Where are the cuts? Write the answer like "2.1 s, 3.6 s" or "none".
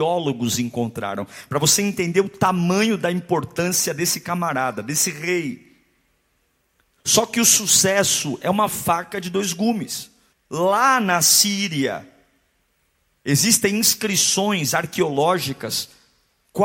10.3 s